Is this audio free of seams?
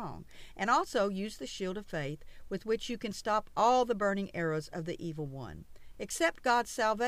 yes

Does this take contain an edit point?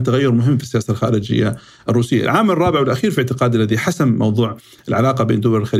no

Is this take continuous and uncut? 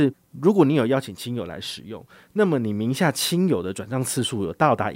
yes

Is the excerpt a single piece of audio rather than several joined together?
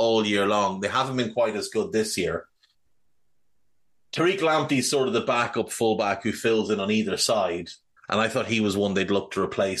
no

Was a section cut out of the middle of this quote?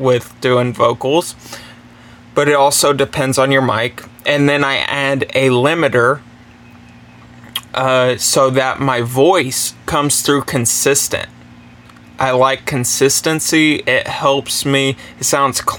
no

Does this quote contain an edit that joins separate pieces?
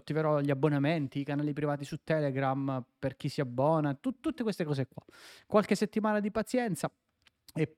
no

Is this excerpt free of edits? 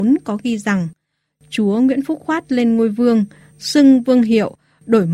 yes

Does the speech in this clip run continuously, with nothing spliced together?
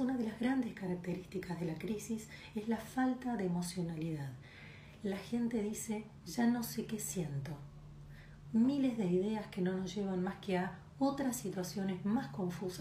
no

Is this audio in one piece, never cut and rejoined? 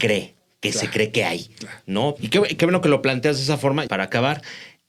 no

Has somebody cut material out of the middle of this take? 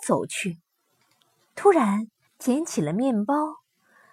yes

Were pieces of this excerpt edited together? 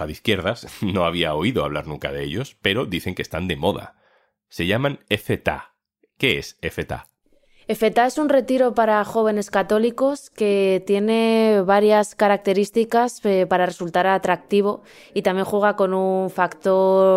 no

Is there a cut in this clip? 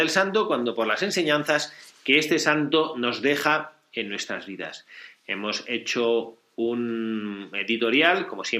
no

